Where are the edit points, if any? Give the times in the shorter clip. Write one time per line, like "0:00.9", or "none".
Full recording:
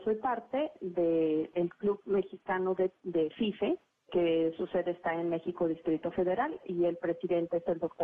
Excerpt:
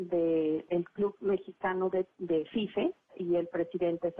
0:03.1